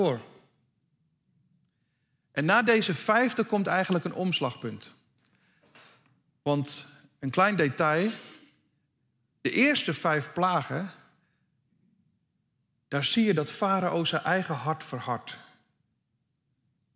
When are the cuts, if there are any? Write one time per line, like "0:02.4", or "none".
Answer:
none